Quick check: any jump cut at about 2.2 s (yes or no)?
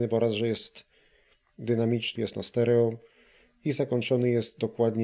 yes